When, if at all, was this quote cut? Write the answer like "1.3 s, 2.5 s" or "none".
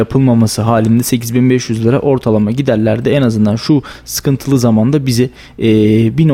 none